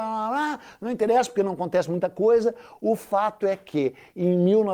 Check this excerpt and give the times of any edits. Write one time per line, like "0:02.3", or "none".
none